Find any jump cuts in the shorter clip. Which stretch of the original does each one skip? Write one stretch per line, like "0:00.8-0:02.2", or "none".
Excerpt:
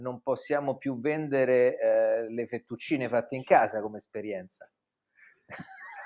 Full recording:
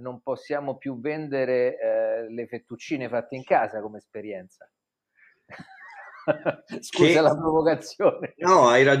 none